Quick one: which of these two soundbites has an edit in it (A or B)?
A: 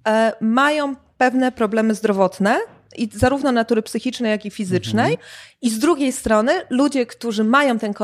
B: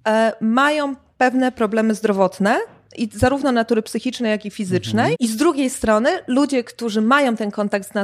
B